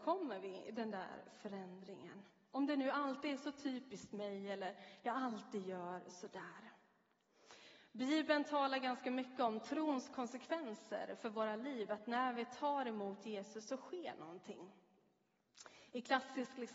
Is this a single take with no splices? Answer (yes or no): yes